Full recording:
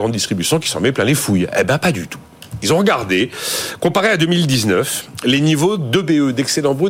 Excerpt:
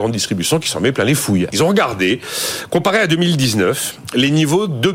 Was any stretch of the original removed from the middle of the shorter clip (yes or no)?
yes